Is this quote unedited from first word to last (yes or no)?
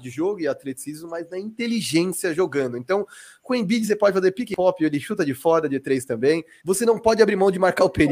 no